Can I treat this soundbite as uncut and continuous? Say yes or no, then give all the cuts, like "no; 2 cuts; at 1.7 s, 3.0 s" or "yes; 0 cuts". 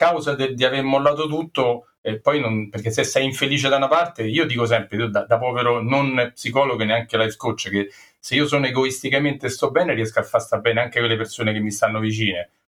yes; 0 cuts